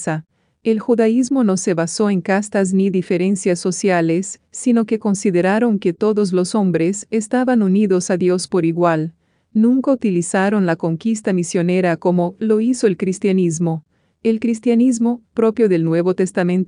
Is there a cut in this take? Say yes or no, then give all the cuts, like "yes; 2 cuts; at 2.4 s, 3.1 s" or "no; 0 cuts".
no; 0 cuts